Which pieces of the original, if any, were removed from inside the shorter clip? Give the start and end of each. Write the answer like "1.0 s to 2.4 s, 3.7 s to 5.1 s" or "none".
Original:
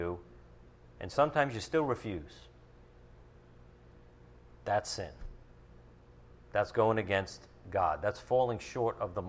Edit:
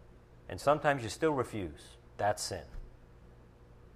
2.6 s to 4.5 s

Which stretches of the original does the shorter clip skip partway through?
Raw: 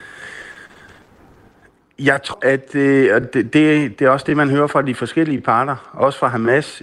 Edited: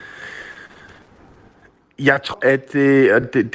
none

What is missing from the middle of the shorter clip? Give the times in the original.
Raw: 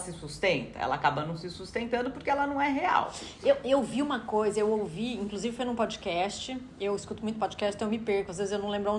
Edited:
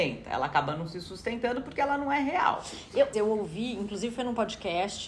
3.6 s to 4.5 s

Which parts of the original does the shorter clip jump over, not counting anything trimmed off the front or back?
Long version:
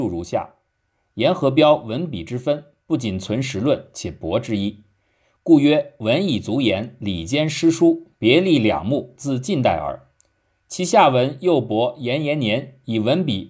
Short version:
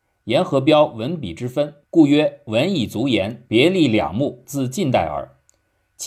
2.7 s to 5.4 s, 7.0 s to 8.2 s

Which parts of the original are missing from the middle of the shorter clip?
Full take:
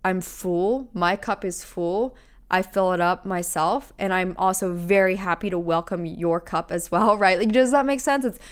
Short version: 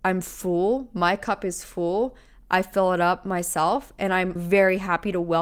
4.4 s to 4.7 s

